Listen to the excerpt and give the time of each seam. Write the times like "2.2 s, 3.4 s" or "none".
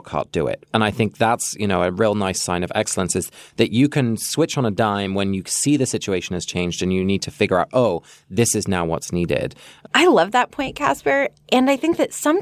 9.9 s